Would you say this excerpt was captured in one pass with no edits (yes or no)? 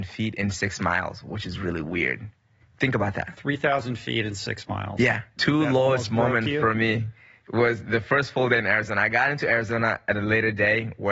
no